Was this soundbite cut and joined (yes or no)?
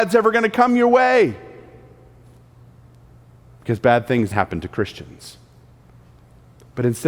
yes